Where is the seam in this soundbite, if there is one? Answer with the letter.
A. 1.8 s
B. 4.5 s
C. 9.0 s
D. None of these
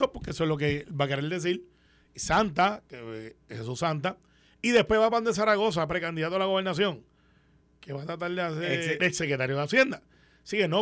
C